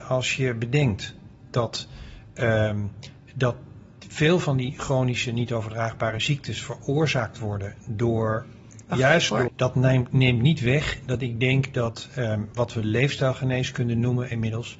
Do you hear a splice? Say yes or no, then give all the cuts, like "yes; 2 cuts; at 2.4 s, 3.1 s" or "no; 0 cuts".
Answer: yes; 1 cut; at 9.5 s